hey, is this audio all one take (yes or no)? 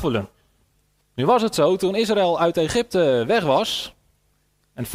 no